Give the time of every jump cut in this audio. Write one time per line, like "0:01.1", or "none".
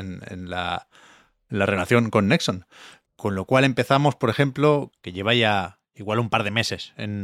0:03.1
0:04.9